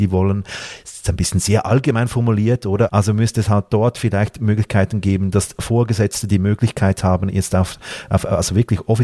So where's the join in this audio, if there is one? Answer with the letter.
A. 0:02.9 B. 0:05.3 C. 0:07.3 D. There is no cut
A